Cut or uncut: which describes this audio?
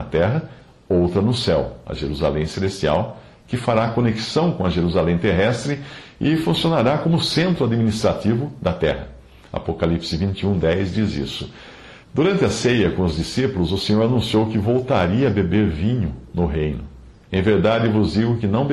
cut